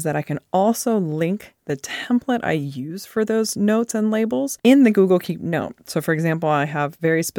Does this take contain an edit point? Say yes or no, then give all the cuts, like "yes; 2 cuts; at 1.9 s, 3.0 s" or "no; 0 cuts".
yes; 1 cut; at 4.6 s